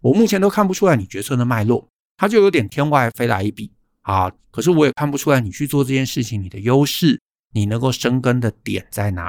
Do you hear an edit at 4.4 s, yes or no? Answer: yes